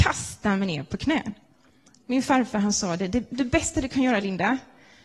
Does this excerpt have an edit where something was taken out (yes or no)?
no